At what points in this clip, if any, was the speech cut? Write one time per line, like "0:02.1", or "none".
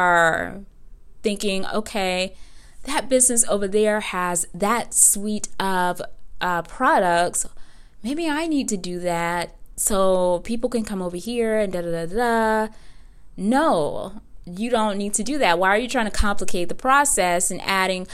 none